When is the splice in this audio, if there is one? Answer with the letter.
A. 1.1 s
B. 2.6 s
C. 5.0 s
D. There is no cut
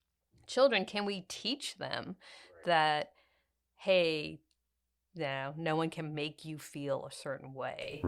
C